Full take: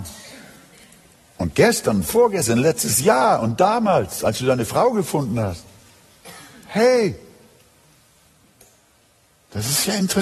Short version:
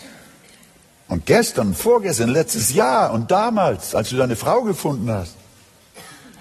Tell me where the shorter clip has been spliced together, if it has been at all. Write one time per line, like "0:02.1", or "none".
none